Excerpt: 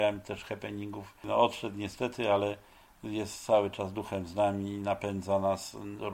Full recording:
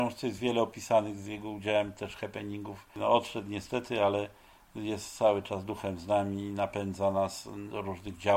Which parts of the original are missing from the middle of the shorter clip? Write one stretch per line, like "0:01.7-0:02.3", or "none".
none